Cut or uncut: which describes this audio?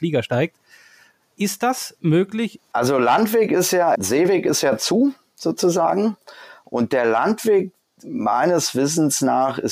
cut